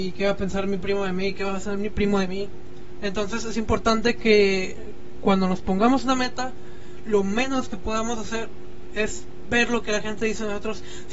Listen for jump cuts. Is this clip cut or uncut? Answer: cut